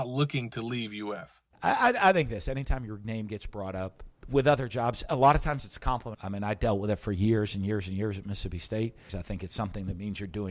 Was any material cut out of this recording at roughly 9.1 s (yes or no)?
yes